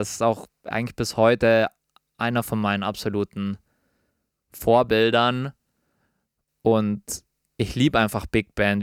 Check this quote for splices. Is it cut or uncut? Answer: uncut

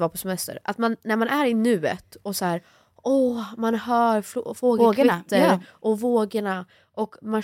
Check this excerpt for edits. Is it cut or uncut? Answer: uncut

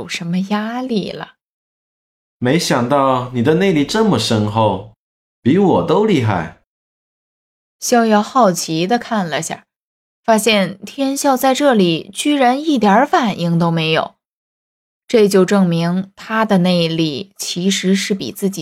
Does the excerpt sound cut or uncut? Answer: cut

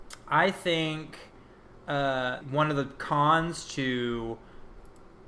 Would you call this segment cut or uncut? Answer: cut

